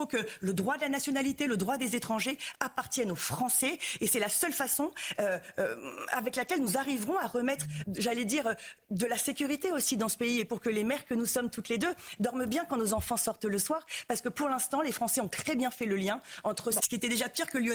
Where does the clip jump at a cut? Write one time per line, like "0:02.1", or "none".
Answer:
0:07.8
0:16.8